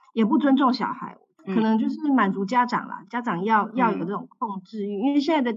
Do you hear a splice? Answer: no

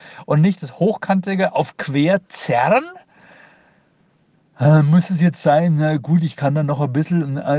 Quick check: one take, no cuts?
yes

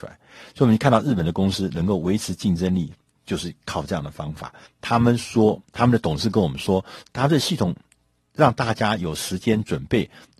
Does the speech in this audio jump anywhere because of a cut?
yes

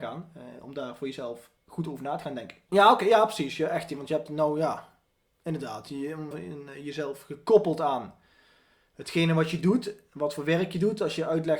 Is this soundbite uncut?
no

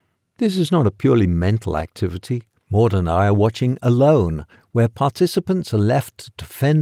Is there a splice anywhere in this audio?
yes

